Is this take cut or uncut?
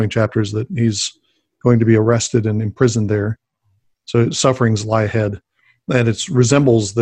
uncut